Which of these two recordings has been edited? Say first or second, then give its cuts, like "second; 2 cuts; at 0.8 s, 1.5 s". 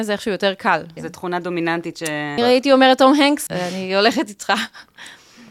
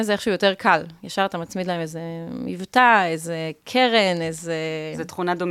first; 3 cuts; at 1.0 s, 2.4 s, 3.5 s